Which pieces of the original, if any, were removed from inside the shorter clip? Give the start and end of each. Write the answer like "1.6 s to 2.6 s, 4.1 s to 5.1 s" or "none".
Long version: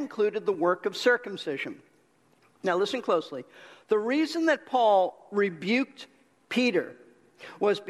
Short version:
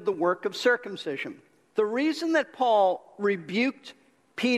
2.1 s to 3.9 s